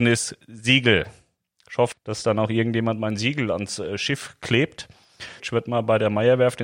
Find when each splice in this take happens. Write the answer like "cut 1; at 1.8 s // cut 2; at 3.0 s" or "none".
cut 1; at 1.9 s // cut 2; at 5.4 s